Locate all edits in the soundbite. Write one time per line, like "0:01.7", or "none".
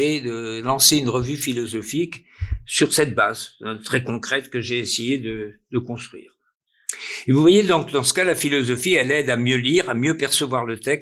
none